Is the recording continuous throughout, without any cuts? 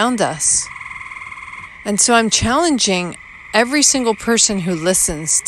yes; 0 cuts

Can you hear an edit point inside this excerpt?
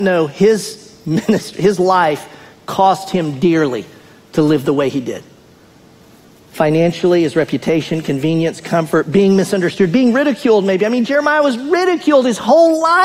no; 0 cuts

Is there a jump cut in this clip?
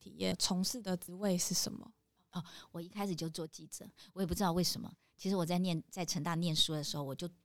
no; 0 cuts

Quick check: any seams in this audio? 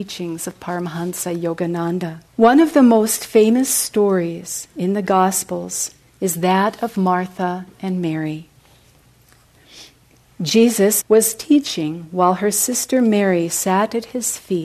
yes; 2 cuts; at 2.3 s, 11.0 s

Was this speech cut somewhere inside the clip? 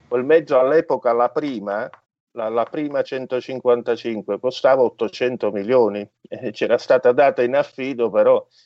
no; 0 cuts

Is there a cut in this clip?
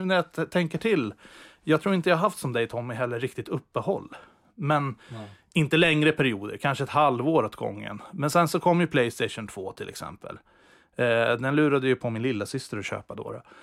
no; 0 cuts

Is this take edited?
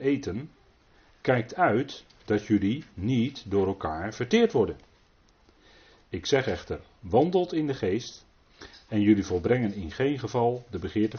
no; 0 cuts

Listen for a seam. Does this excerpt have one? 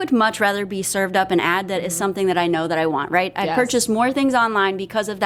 no; 0 cuts

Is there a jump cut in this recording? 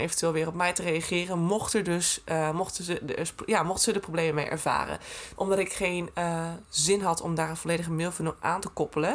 yes; 1 cut; at 5.4 s

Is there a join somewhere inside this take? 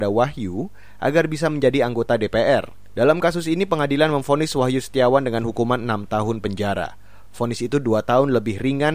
no; 0 cuts

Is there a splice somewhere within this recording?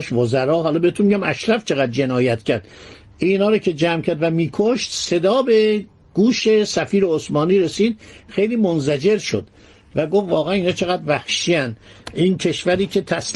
no; 0 cuts

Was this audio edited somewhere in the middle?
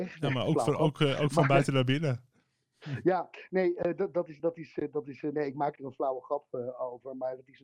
no; 0 cuts

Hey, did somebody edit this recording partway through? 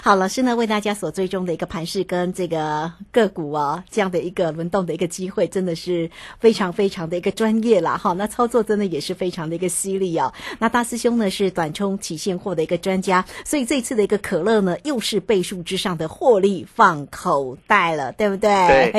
no; 0 cuts

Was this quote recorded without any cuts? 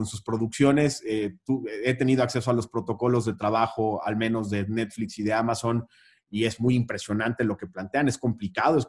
yes; 0 cuts

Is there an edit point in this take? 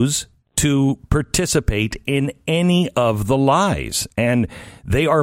no; 0 cuts

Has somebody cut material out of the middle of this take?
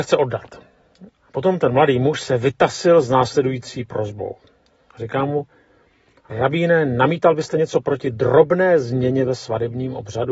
yes; 1 cut; at 1.1 s

